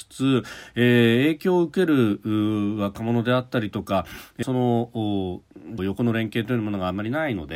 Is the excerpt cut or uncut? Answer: cut